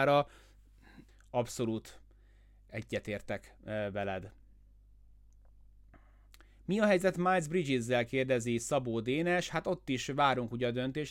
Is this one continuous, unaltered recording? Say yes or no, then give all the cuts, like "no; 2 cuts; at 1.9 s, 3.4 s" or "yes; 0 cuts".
no; 1 cut; at 1.1 s